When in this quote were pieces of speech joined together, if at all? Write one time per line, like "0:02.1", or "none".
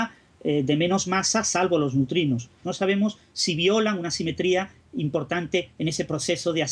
0:02.6